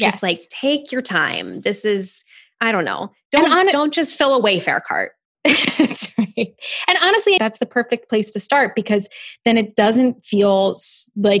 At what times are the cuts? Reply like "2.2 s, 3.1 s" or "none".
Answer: 7.4 s

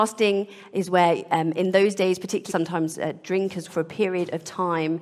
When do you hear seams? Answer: 2.5 s, 3.7 s

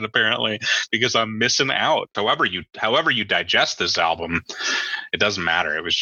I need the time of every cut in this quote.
2.1 s

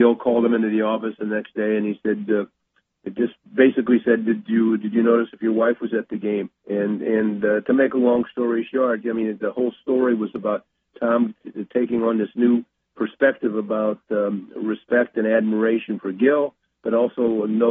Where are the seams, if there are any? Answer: 6.6 s

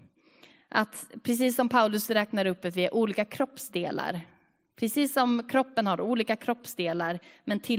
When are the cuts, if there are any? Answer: none

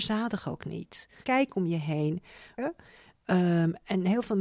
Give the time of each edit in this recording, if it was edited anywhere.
1.2 s, 2.6 s

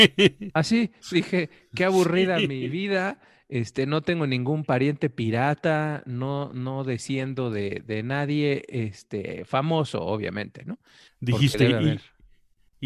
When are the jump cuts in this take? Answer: 11.1 s

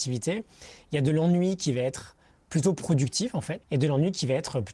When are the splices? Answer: 3.6 s

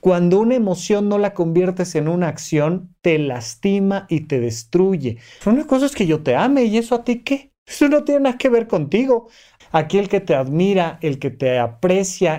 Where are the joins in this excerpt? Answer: 5.4 s, 9.6 s

